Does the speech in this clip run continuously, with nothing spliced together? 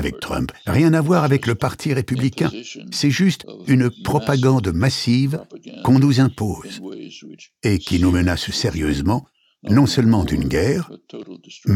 yes; 0 cuts

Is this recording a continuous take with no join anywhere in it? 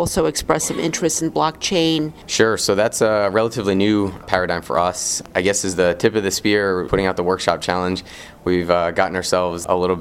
no; 1 cut; at 2.2 s

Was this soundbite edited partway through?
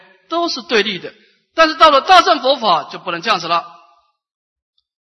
no; 0 cuts

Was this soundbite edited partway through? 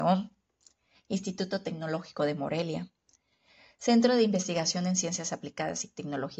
yes; 1 cut; at 0.9 s

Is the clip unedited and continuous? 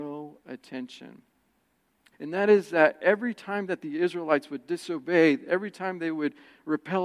no; 1 cut; at 2.1 s

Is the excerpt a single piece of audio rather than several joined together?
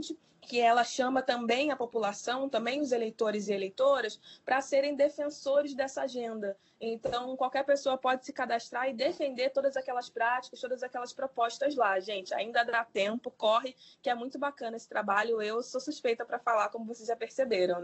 yes; 0 cuts

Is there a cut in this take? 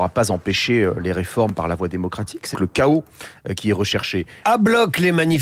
yes; 2 cuts; at 2.5 s, 4.4 s

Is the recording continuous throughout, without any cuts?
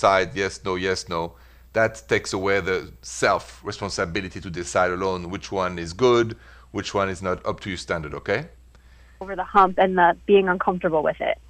no; 1 cut; at 9.2 s

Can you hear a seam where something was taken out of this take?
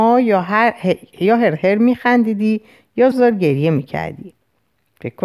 yes; 1 cut; at 3.1 s

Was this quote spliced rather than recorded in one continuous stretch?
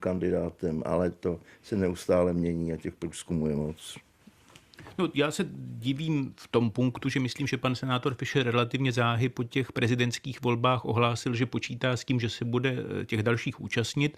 no; 0 cuts

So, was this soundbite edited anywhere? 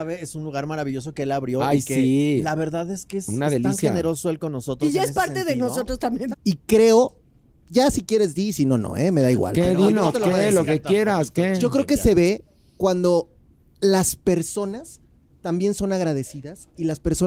yes; 1 cut; at 6.3 s

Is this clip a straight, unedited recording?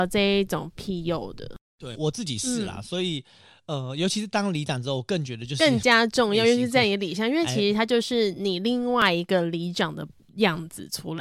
no; 1 cut; at 1.9 s

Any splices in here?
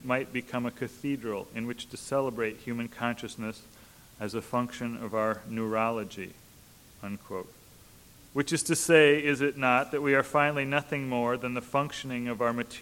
no; 0 cuts

